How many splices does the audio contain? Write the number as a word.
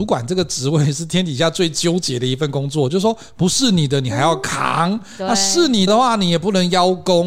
one